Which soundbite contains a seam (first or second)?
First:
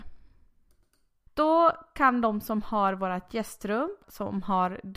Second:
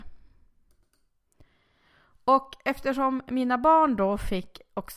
first